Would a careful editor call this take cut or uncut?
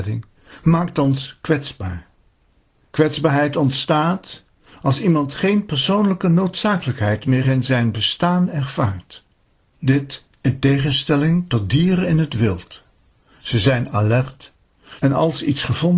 cut